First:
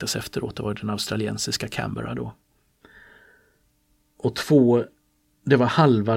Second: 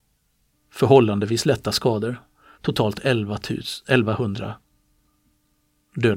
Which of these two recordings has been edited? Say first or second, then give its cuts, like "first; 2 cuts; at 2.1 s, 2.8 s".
second; 1 cut; at 2.5 s